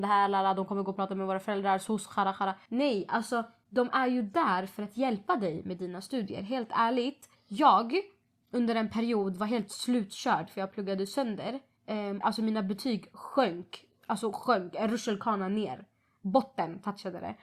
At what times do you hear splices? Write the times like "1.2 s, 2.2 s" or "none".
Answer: 12.2 s